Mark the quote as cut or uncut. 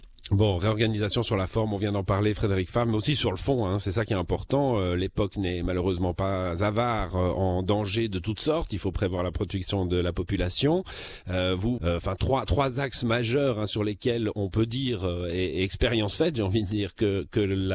cut